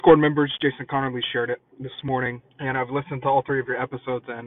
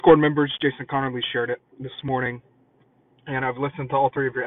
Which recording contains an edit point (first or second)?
first